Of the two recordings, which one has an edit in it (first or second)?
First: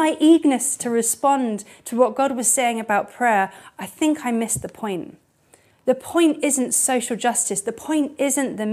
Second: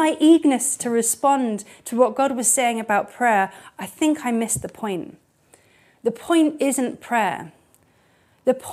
first